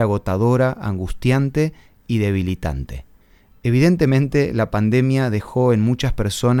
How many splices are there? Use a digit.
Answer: 0